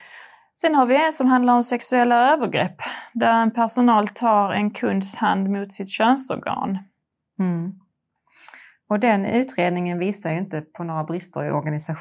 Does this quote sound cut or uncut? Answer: uncut